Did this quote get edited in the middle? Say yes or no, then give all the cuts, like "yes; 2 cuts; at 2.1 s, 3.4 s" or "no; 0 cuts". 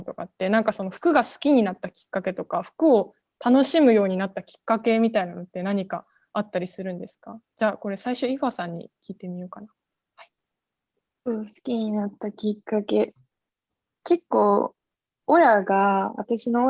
no; 0 cuts